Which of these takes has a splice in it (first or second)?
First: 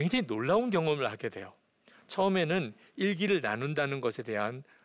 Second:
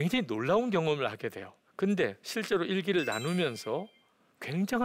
second